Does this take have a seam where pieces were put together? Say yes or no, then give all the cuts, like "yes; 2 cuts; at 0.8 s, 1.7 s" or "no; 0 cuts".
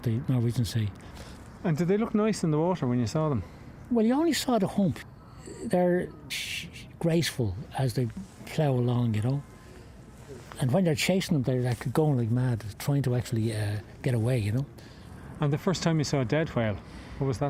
yes; 1 cut; at 6.3 s